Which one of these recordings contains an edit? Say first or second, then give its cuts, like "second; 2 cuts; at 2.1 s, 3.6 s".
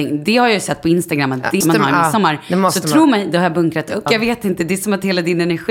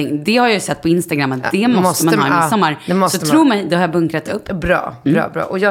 first; 2 cuts; at 1.6 s, 4.1 s